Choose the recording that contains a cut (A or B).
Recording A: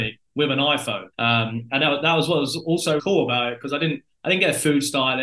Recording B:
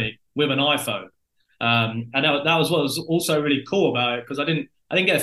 A